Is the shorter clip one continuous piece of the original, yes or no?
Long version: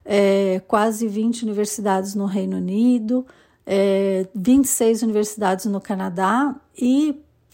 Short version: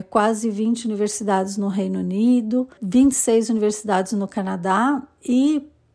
no